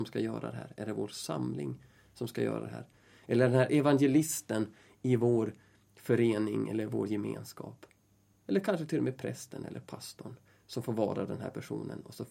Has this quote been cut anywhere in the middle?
no; 0 cuts

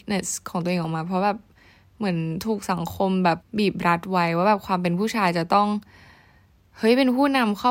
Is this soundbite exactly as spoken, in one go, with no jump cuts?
no; 1 cut; at 3.4 s

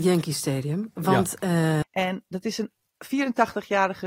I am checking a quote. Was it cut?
yes; 1 cut; at 1.8 s

